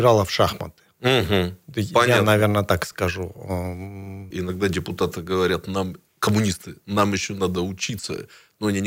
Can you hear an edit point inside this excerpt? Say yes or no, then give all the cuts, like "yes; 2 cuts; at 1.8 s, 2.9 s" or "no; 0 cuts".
yes; 1 cut; at 4.3 s